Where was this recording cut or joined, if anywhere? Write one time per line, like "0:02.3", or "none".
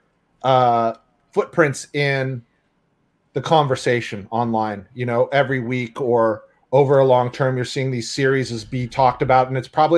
none

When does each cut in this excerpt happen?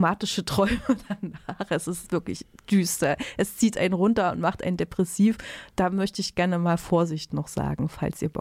none

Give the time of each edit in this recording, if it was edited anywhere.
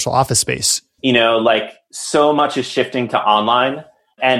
0:01.0

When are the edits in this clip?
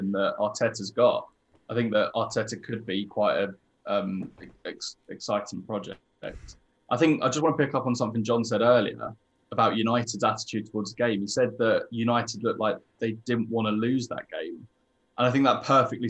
none

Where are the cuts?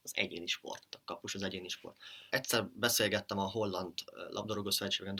0:02.3

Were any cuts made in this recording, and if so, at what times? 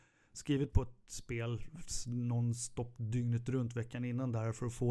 none

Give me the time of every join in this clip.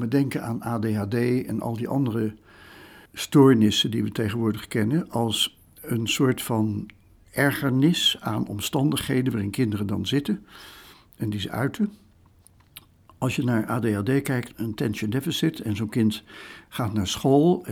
0:03.1
0:14.5

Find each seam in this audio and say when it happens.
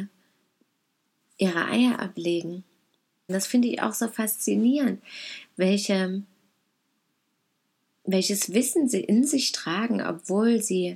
0:03.3

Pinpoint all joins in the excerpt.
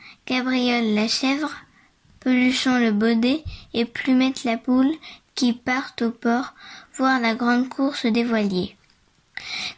none

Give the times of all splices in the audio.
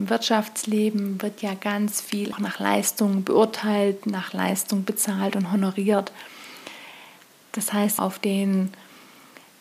0:02.3
0:08.0

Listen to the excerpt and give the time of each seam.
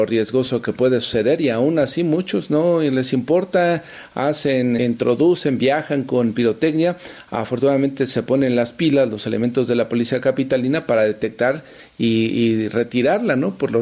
0:04.8

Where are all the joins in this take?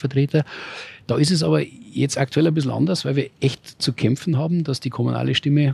none

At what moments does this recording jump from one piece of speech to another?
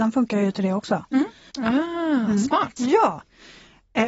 0:01.5
0:02.8

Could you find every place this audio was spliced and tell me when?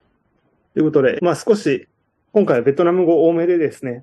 0:01.2

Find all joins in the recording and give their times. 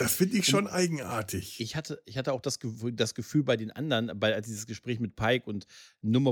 none

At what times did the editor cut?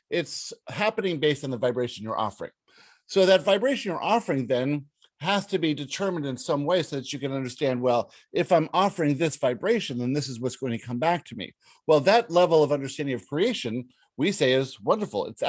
none

